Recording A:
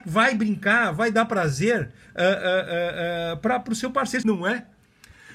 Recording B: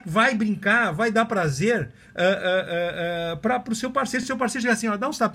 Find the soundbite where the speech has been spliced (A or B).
A